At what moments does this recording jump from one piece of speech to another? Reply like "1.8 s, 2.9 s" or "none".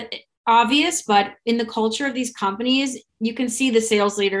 3.1 s